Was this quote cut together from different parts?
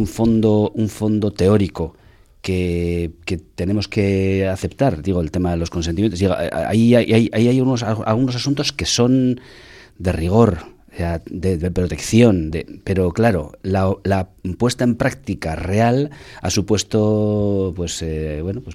no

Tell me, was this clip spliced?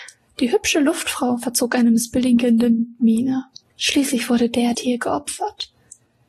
yes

